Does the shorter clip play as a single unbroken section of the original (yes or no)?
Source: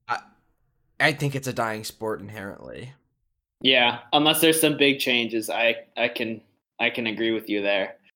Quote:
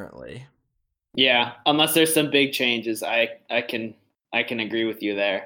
yes